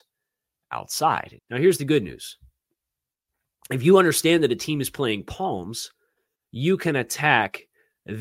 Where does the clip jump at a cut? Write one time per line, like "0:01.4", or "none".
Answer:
0:01.4